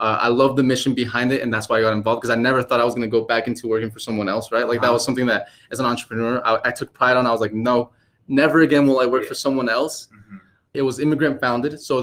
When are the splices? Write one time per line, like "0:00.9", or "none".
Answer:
0:10.7